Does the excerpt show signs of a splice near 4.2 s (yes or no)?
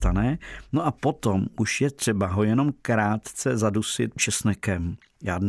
yes